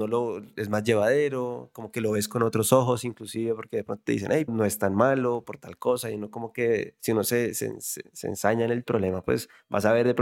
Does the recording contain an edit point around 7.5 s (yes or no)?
no